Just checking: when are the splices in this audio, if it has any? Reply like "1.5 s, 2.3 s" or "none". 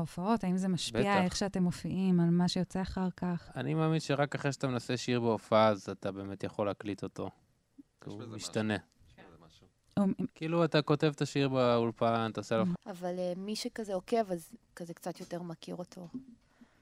10.3 s, 12.7 s